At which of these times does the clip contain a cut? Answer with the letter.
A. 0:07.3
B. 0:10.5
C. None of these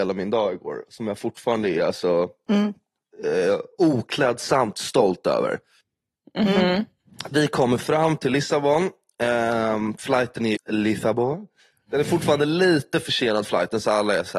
B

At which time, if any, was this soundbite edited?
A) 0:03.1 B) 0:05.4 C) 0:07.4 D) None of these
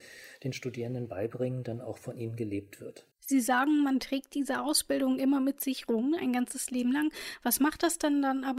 A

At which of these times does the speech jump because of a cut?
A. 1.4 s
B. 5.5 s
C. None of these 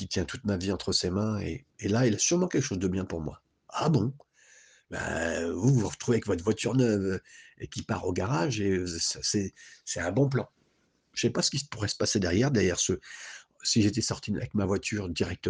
C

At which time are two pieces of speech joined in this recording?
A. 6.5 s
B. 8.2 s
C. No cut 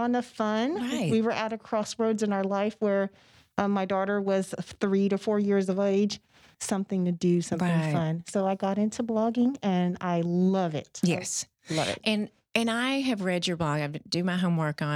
A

